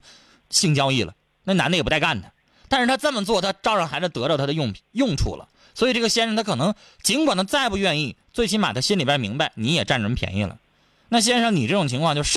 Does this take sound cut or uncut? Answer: uncut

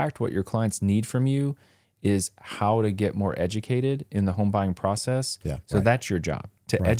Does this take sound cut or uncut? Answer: cut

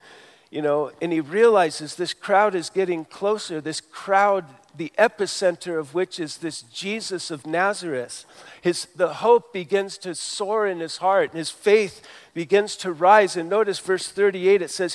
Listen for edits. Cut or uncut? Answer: uncut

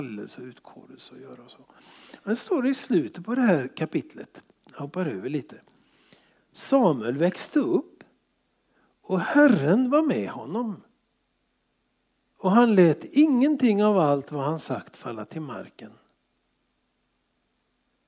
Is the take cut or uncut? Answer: uncut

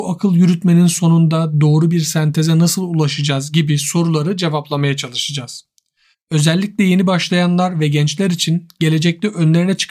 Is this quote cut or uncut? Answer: cut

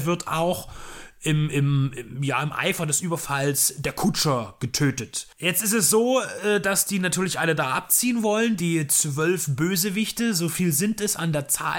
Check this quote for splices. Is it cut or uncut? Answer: cut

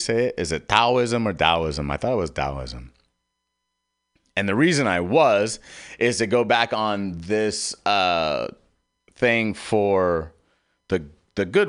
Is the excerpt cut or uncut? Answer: uncut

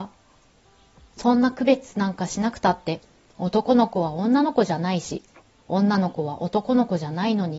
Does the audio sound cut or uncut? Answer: uncut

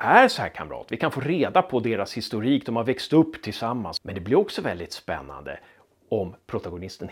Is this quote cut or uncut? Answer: uncut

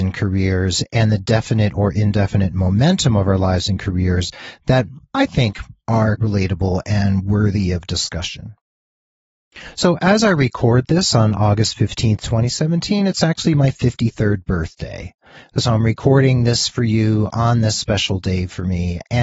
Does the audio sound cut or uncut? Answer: cut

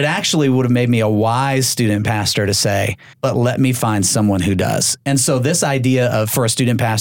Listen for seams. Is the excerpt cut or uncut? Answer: cut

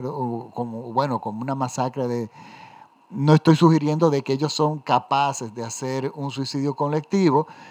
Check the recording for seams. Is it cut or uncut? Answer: uncut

